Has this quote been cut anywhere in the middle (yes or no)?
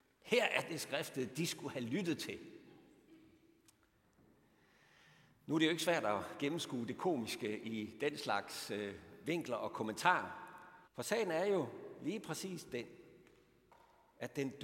yes